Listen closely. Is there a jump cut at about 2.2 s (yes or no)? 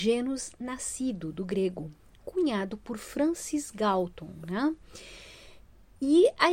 no